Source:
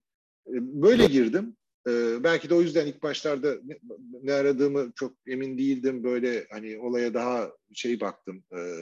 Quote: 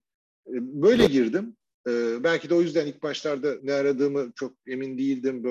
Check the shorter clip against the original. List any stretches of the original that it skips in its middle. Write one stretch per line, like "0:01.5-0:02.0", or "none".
0:03.6-0:04.2